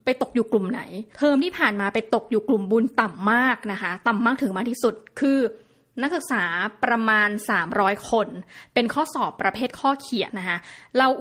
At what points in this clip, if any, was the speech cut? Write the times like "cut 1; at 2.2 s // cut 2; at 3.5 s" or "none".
cut 1; at 10.3 s